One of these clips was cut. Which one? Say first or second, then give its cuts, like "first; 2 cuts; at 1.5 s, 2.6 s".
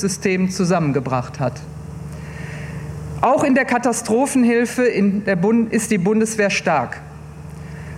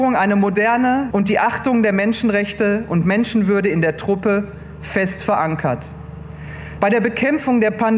second; 2 cuts; at 1.1 s, 6.8 s